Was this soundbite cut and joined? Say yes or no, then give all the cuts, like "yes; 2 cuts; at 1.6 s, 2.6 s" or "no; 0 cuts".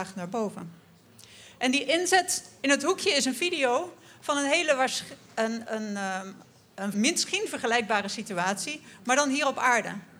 yes; 1 cut; at 6.9 s